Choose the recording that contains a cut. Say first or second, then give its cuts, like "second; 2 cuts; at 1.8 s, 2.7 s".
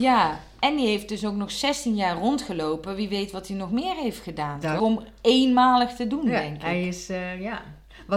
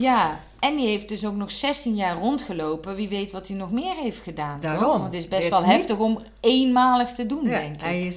first; 1 cut; at 4.8 s